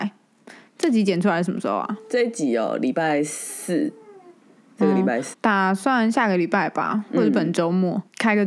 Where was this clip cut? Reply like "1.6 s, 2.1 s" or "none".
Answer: 5.3 s